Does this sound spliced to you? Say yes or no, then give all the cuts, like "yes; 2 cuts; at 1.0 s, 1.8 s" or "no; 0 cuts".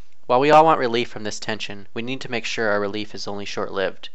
no; 0 cuts